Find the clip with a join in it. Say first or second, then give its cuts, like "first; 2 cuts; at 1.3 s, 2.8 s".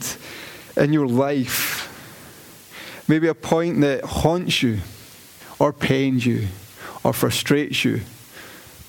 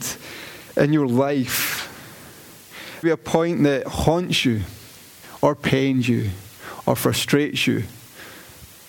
second; 1 cut; at 3.0 s